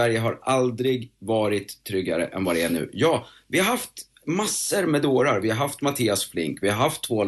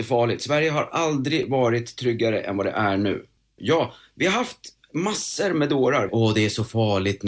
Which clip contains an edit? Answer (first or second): second